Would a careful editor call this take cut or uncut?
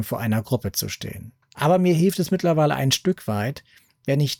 cut